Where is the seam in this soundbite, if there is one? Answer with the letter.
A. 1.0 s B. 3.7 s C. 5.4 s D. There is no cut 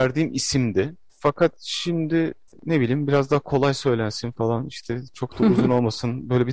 D